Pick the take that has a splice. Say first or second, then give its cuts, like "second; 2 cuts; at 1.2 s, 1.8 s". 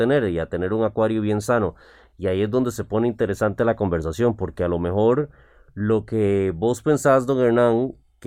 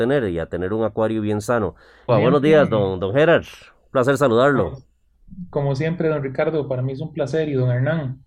second; 1 cut; at 2.1 s